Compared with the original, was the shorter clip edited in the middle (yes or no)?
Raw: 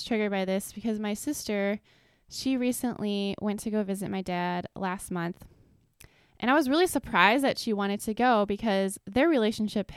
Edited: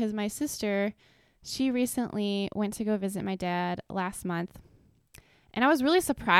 no